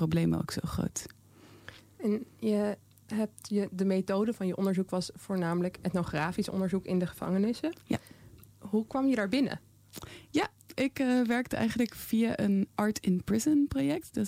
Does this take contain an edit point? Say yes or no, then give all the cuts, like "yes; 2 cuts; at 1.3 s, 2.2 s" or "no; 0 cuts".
yes; 2 cuts; at 10.7 s, 12.7 s